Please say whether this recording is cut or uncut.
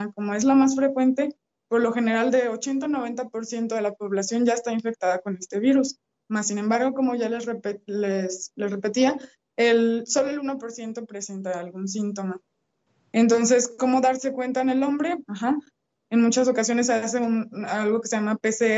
cut